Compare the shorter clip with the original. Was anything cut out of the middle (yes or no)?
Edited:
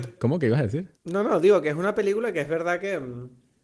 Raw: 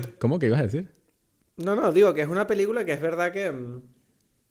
yes